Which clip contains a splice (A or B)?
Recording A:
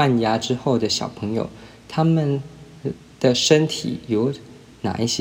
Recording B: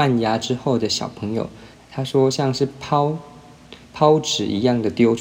B